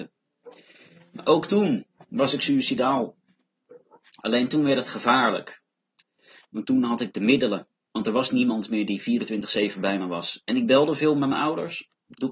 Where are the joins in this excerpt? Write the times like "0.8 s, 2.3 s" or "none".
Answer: none

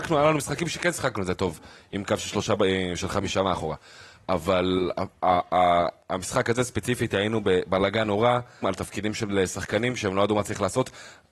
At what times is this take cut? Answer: 8.6 s

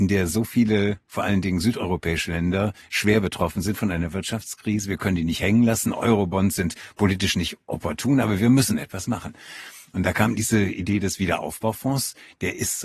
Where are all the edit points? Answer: none

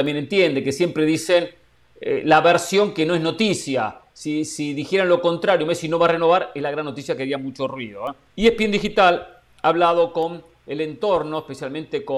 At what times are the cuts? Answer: 8.3 s

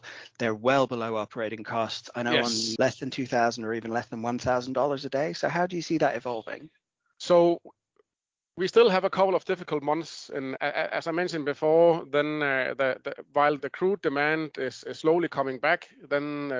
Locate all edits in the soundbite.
2.8 s, 10.6 s, 13.6 s

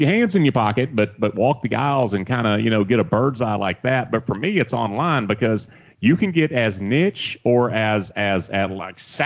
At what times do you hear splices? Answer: none

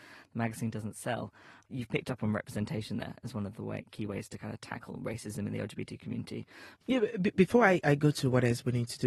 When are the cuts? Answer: 6.7 s, 7.8 s

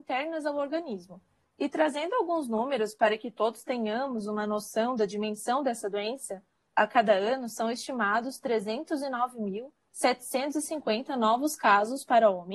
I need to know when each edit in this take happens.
1.5 s, 6.7 s

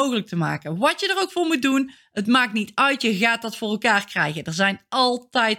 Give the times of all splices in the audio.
none

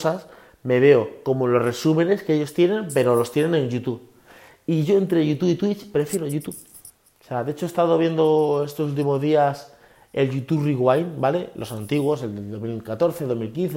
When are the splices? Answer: none

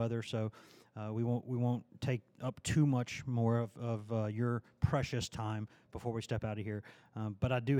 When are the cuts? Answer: none

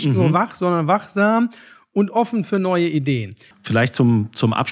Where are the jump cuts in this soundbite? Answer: 3.5 s

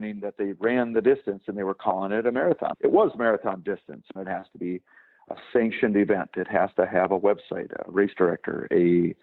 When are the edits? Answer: 2.7 s, 4.2 s

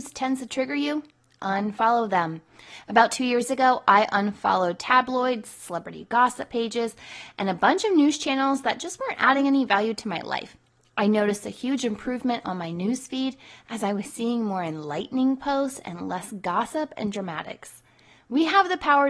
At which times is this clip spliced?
none

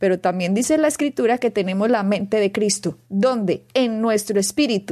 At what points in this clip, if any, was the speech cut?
none

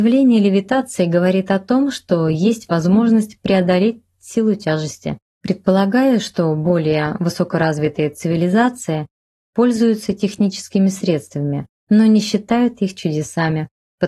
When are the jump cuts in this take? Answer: 5.2 s, 11.7 s

